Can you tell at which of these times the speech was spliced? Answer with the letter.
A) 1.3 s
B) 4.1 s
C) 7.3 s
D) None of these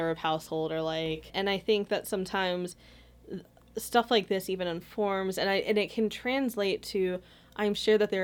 A